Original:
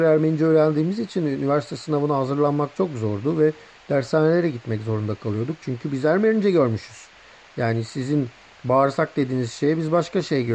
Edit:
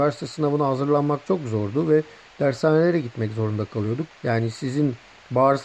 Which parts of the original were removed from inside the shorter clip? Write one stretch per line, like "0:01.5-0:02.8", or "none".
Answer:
0:05.6-0:07.4